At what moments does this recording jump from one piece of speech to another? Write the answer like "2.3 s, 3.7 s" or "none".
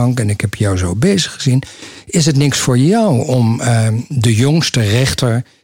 none